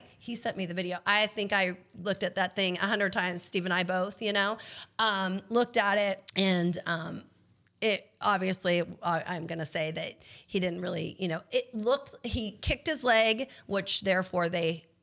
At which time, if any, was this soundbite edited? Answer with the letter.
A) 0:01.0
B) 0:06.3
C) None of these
B